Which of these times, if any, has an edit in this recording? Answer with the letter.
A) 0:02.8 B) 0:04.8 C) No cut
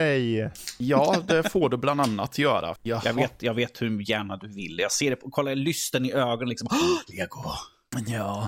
A